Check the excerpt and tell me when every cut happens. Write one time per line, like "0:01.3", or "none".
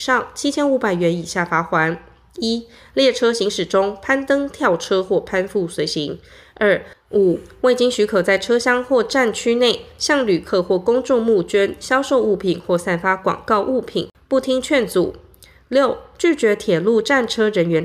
0:06.9

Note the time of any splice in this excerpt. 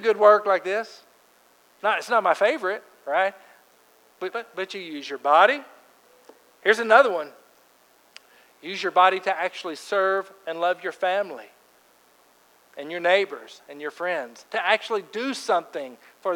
0:04.3
0:14.5

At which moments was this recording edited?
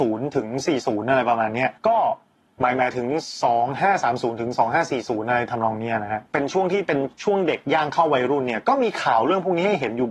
0:01.8
0:06.3

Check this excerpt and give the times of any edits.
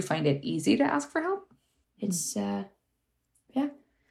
0:01.8

